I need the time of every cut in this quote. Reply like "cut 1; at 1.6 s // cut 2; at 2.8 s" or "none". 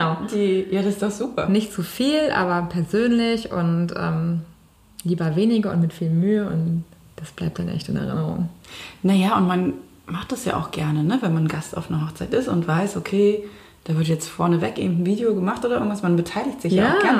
none

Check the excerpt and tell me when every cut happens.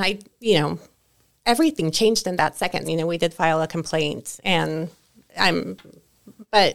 cut 1; at 2.8 s

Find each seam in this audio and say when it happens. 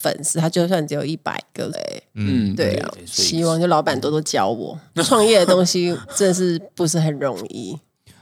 cut 1; at 1.7 s // cut 2; at 2.9 s

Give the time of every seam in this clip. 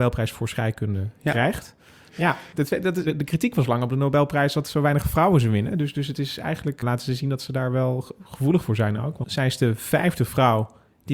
cut 1; at 2.1 s // cut 2; at 6.8 s // cut 3; at 9.2 s

